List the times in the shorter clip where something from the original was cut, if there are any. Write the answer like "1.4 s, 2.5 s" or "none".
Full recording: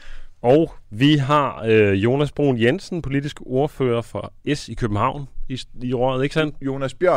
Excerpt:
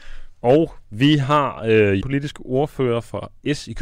2.0 s